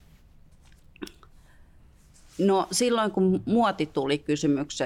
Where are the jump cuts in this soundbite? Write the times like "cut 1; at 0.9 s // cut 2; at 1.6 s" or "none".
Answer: none